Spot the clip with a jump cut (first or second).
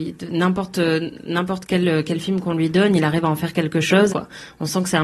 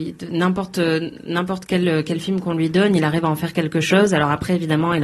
first